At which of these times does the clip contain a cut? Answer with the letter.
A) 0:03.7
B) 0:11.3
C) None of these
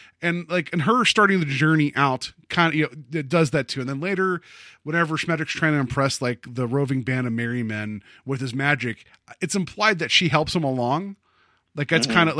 C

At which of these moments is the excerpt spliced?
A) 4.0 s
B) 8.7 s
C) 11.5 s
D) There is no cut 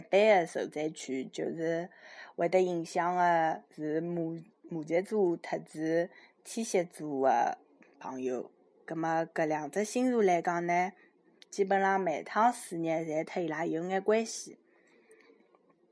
D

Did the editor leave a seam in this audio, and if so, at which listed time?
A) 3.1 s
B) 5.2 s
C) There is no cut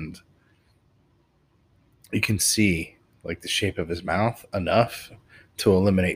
C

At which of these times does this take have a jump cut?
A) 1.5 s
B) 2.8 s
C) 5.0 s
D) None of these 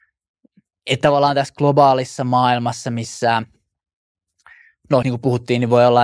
C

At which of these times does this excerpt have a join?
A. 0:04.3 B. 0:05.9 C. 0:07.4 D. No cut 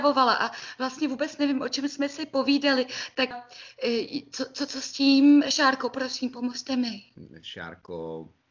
D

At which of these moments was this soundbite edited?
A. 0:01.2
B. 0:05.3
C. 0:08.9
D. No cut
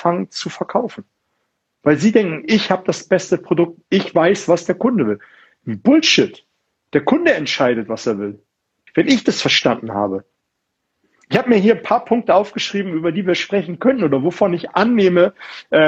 C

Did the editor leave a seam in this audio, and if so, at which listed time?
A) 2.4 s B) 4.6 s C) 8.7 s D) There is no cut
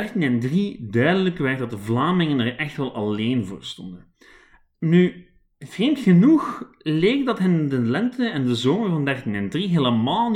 D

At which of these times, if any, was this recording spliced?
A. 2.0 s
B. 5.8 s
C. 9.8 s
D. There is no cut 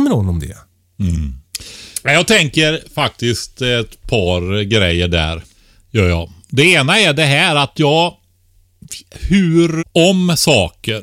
C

